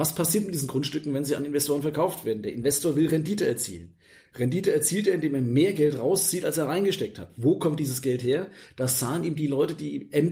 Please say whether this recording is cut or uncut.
uncut